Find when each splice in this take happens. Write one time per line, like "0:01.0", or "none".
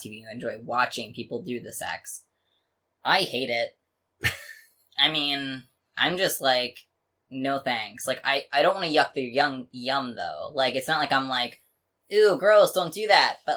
none